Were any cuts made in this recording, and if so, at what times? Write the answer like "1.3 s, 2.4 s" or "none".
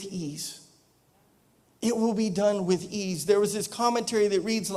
none